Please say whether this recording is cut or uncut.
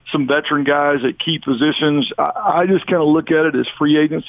uncut